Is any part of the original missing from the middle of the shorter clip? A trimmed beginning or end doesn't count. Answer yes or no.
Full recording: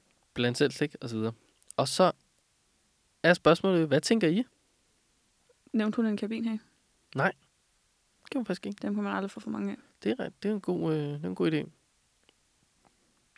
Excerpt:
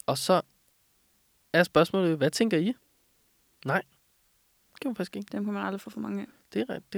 yes